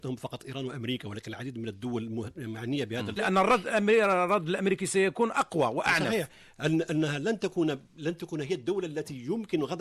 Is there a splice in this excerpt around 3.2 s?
yes; 1 cut; at 3.2 s

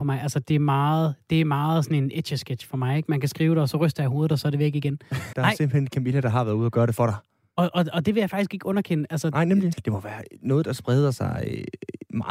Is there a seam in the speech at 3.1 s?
no; 2 cuts; at 5.3 s, 9.7 s

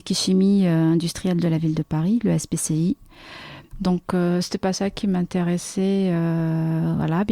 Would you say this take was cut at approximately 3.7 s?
yes; 1 cut; at 3.7 s

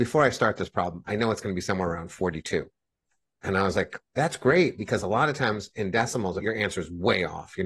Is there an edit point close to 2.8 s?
no; 2 cuts; at 4.0 s, 6.4 s

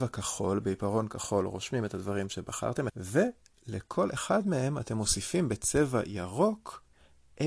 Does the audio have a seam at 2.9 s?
yes; 1 cut; at 2.9 s

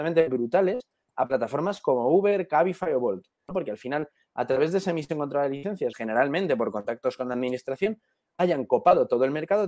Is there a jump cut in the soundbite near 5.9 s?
yes; 2 cuts; at 3.5 s, 5.9 s

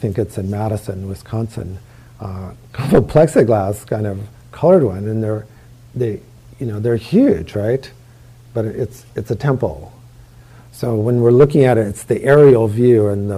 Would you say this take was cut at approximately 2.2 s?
no; 0 cuts

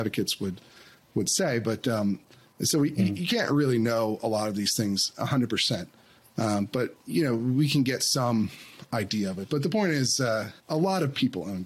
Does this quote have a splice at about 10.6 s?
yes; 1 cut; at 10.6 s

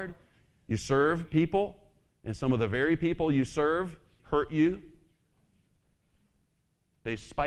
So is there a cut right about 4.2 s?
yes; 1 cut; at 4.2 s

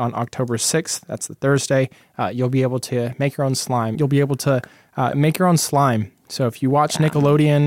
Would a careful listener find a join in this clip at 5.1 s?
yes; 2 cuts; at 3.9 s, 5.1 s

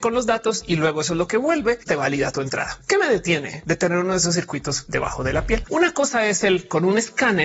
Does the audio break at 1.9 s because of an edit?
yes; 2 cuts; at 1.9 s, 5.6 s

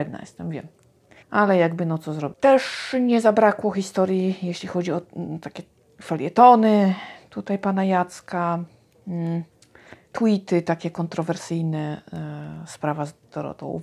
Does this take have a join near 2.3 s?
yes; 1 cut; at 2.3 s

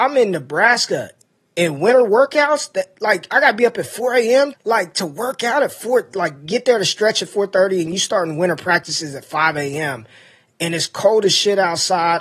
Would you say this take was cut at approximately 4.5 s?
yes; 1 cut; at 4.5 s

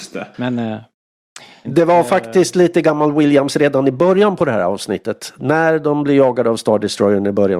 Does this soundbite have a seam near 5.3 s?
no; 1 cut; at 1.6 s

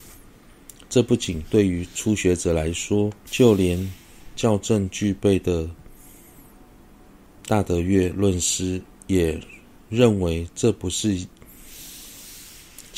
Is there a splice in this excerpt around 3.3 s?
yes; 1 cut; at 3.3 s

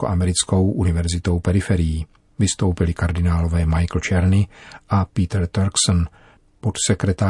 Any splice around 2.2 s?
no; 0 cuts

